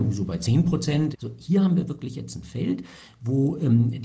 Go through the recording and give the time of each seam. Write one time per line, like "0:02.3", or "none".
0:01.1